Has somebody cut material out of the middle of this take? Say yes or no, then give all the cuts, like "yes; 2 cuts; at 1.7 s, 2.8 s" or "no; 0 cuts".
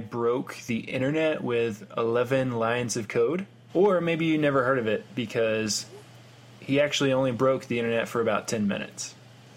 yes; 1 cut; at 3.7 s